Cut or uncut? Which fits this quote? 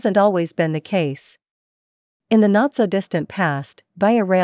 uncut